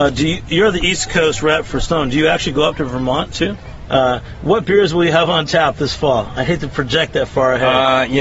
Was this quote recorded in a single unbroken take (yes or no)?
no